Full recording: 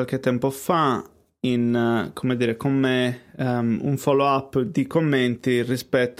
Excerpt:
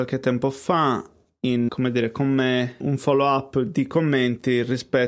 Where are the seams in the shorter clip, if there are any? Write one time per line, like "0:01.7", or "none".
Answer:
0:01.7
0:02.8